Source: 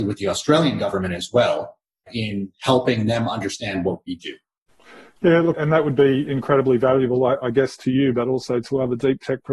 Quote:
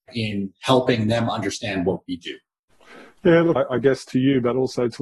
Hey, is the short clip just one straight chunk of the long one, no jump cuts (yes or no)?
no